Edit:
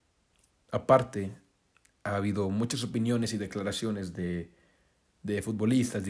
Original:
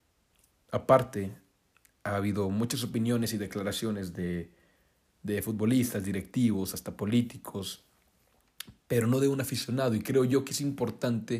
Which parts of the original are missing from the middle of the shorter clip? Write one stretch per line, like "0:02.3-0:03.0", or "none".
none